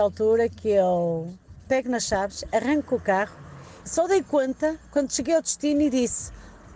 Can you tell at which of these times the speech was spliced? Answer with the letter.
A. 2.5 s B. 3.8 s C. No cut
B